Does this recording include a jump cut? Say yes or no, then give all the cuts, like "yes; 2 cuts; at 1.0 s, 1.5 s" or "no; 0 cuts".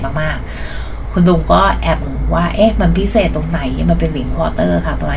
yes; 1 cut; at 2.0 s